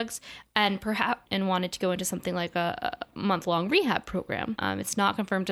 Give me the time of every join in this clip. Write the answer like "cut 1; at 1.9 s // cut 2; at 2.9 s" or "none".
cut 1; at 1.3 s // cut 2; at 4.6 s